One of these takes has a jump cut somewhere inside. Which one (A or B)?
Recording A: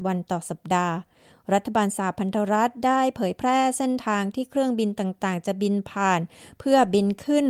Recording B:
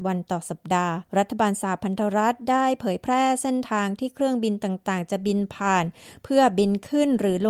B